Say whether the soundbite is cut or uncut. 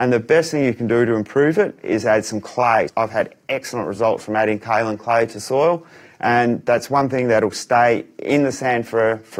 cut